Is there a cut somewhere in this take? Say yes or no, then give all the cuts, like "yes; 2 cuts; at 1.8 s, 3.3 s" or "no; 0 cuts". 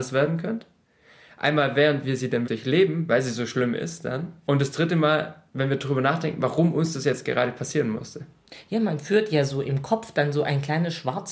yes; 1 cut; at 2.5 s